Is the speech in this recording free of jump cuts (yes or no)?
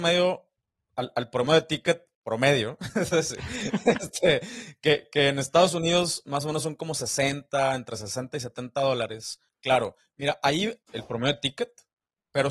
no